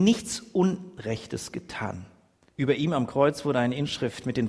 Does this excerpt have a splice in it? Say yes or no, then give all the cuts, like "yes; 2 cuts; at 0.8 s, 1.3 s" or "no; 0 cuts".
yes; 1 cut; at 2.5 s